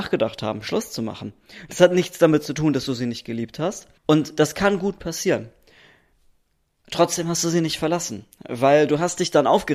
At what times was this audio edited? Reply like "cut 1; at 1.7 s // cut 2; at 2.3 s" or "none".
cut 1; at 4.0 s